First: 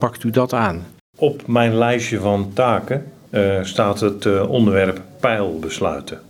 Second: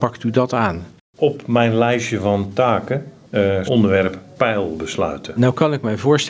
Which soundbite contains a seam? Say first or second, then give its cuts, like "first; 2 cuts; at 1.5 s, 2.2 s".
second; 2 cuts; at 3.7 s, 5.4 s